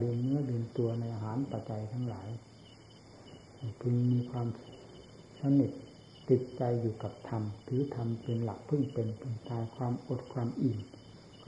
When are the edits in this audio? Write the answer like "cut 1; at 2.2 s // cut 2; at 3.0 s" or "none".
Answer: cut 1; at 1.6 s